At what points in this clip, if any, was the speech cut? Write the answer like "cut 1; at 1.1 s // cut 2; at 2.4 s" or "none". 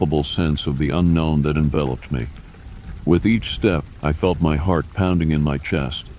none